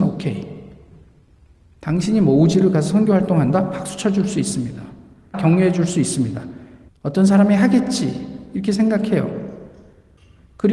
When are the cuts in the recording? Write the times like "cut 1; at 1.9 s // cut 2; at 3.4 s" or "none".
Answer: cut 1; at 5.3 s // cut 2; at 6.9 s

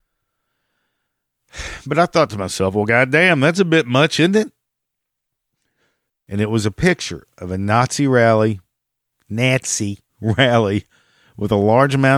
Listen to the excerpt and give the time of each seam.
cut 1; at 6.1 s // cut 2; at 10.1 s

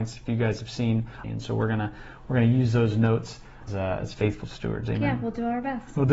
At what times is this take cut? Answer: cut 1; at 1.2 s // cut 2; at 3.7 s

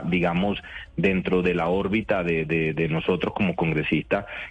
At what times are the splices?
none

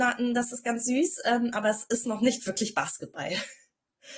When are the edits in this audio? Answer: none

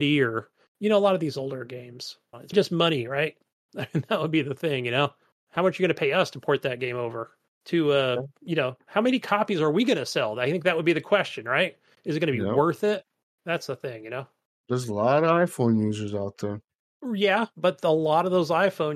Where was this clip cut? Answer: cut 1; at 2.5 s

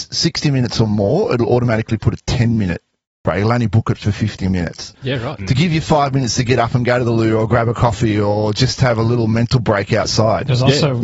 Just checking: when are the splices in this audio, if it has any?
cut 1; at 5.4 s

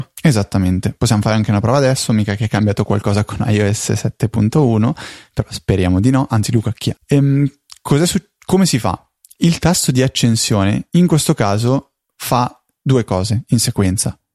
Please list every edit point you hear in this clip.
cut 1; at 7.0 s

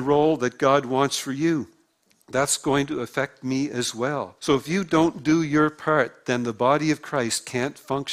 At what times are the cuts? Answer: cut 1; at 4.4 s

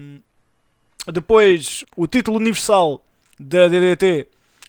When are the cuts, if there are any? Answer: cut 1; at 1.8 s

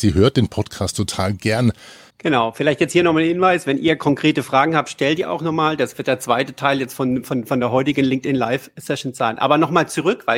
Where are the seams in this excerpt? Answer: cut 1; at 2.1 s

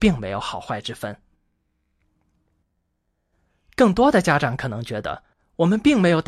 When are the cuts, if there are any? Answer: none

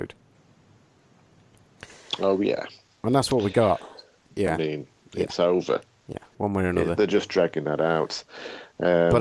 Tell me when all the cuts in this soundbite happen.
cut 1; at 4.3 s

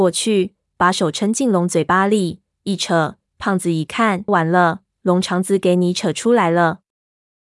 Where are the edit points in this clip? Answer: cut 1; at 3.2 s // cut 2; at 4.3 s

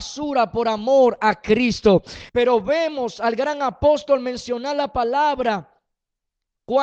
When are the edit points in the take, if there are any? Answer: cut 1; at 2.3 s

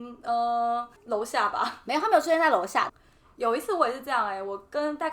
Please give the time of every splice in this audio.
cut 1; at 1.0 s // cut 2; at 2.9 s

